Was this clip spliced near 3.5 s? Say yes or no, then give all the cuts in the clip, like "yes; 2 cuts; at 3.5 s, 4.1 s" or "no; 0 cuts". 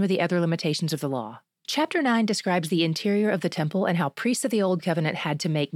no; 1 cut; at 1.5 s